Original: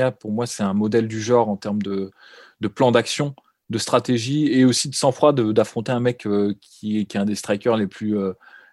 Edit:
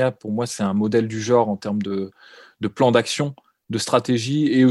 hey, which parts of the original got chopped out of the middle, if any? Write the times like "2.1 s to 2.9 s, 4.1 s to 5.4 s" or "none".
none